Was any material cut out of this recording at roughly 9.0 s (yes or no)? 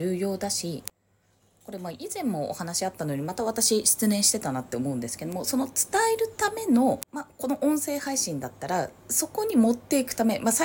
yes